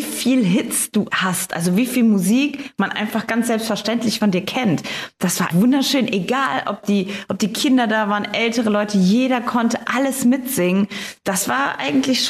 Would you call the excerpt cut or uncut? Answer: cut